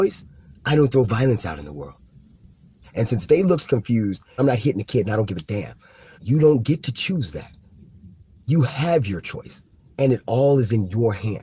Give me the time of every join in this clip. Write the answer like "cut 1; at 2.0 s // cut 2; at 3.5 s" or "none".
cut 1; at 2.8 s // cut 2; at 4.4 s // cut 3; at 6.1 s